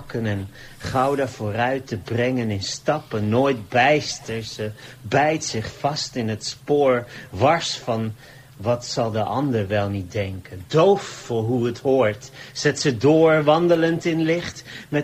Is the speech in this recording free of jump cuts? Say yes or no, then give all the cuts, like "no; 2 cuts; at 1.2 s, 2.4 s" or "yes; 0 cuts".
yes; 0 cuts